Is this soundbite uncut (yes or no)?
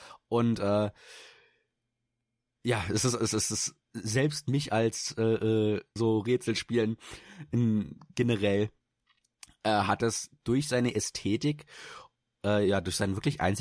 no